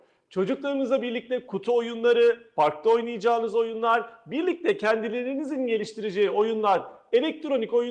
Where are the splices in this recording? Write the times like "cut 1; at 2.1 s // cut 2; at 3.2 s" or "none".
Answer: none